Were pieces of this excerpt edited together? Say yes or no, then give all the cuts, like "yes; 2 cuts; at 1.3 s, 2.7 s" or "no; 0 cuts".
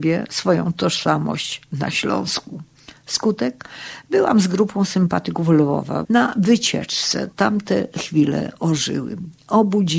yes; 2 cuts; at 6.0 s, 7.3 s